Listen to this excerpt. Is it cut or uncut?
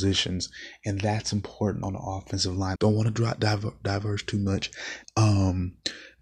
cut